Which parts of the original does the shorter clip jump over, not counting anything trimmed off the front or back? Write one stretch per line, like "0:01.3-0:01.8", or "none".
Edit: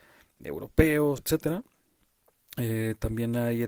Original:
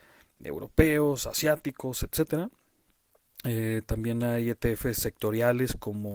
0:01.2-0:02.1